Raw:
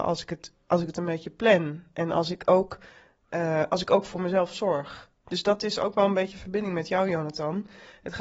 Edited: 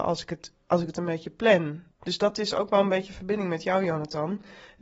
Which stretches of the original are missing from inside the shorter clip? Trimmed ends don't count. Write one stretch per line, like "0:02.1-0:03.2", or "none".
0:01.9-0:05.2